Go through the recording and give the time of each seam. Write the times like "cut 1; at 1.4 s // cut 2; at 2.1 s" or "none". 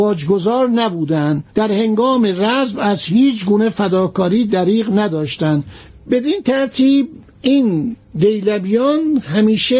cut 1; at 1.5 s